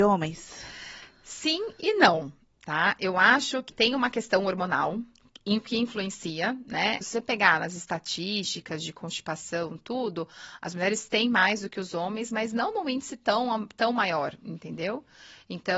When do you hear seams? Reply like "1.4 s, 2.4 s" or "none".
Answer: 3.7 s, 7.0 s